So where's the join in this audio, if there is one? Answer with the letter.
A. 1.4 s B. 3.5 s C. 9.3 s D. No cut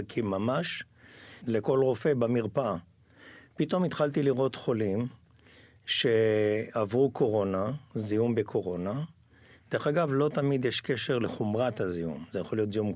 A